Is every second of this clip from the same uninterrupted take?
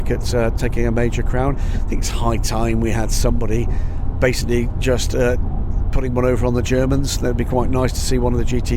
yes; 0 cuts

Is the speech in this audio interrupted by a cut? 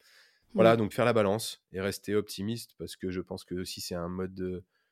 yes; 1 cut; at 0.9 s

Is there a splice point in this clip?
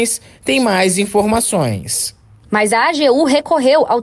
yes; 1 cut; at 2.4 s

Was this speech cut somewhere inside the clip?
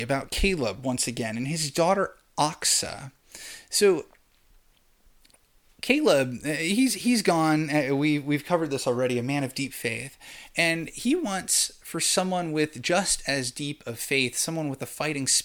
no; 0 cuts

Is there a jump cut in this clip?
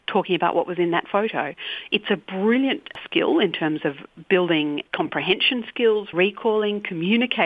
yes; 1 cut; at 6.1 s

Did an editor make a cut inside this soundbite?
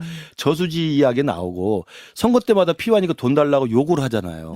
no; 0 cuts

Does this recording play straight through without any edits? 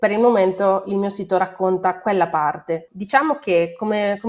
no; 1 cut; at 2.9 s

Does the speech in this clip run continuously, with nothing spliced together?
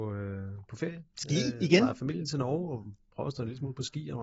yes; 0 cuts

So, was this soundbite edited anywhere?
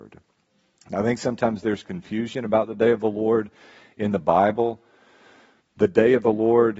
no; 0 cuts

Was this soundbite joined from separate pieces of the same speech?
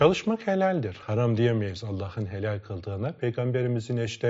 no; 0 cuts

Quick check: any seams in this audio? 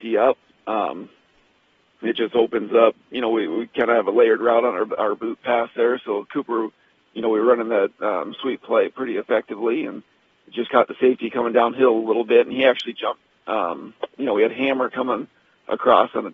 no; 0 cuts

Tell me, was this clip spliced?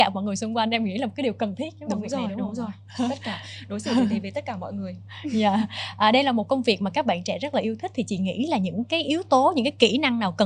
no; 0 cuts

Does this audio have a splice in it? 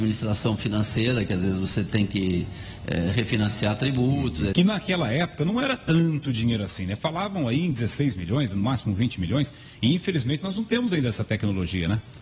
yes; 1 cut; at 4.5 s

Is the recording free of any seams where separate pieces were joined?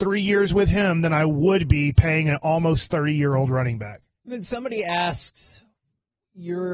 yes; 0 cuts

